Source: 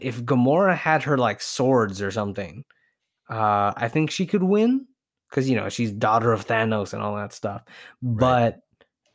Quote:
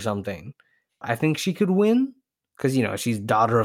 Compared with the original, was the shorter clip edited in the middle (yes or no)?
yes